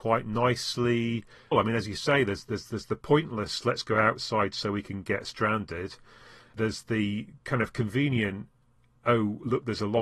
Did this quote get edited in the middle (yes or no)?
yes